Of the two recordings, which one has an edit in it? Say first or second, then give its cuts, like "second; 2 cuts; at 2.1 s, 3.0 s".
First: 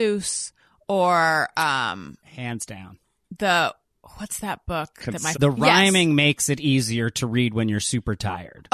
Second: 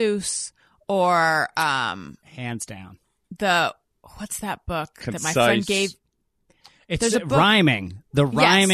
first; 1 cut; at 5.3 s